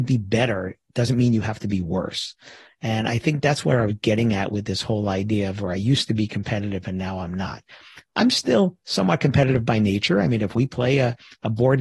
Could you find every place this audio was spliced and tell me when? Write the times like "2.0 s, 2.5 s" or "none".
none